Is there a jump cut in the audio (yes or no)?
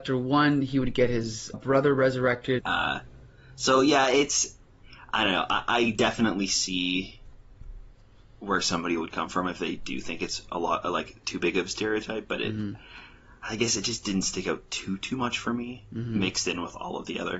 yes